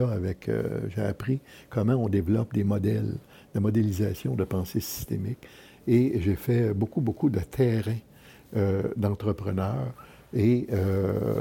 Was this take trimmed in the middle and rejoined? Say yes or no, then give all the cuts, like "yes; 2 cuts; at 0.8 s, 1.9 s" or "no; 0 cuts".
no; 0 cuts